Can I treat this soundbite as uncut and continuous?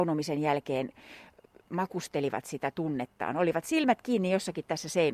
yes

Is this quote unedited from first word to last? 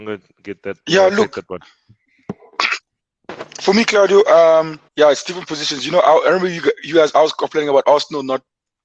no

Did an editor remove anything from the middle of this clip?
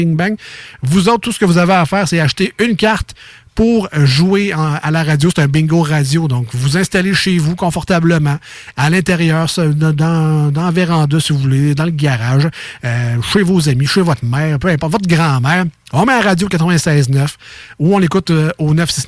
no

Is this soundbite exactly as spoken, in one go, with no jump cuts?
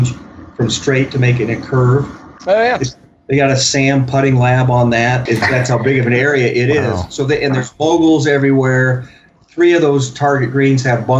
no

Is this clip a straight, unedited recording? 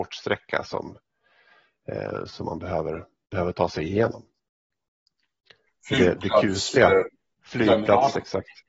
yes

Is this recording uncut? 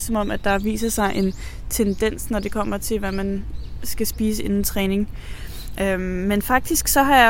no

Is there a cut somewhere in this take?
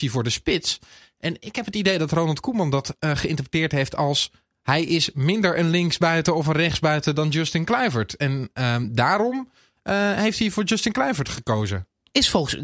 no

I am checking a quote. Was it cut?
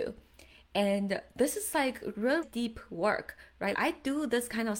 yes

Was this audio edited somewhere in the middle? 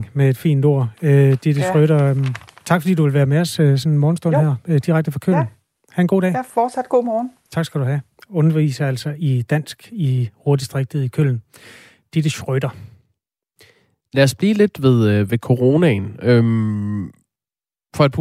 no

